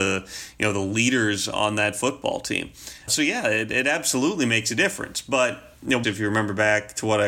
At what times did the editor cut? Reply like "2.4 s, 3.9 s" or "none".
3.1 s, 6.0 s